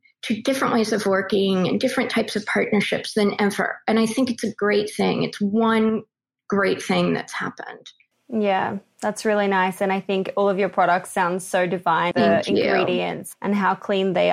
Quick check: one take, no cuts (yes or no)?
no